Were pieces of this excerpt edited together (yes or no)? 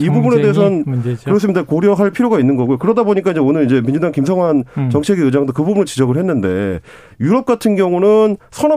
no